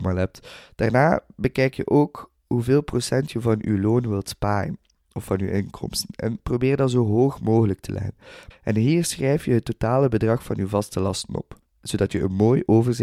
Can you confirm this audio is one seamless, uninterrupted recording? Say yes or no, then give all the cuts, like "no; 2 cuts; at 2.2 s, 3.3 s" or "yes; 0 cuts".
no; 1 cut; at 8.5 s